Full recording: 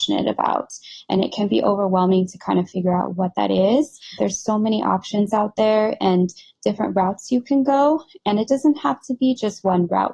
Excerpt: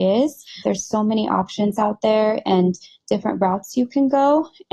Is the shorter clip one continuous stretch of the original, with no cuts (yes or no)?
yes